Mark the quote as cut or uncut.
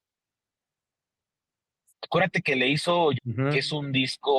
cut